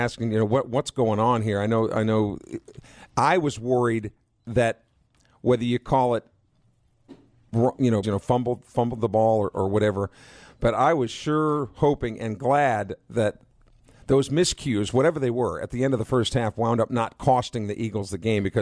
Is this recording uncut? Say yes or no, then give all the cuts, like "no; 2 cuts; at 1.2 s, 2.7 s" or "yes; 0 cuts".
no; 1 cut; at 8.0 s